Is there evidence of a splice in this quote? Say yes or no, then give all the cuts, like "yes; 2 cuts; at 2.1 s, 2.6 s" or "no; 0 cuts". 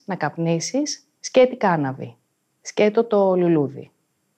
no; 0 cuts